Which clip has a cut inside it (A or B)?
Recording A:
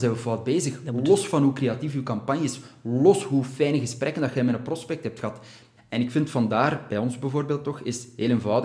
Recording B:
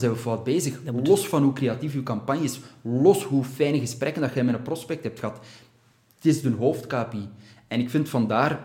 A